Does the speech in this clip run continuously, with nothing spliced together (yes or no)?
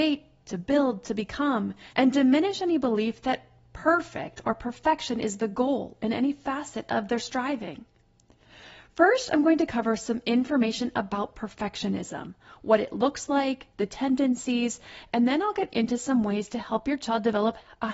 no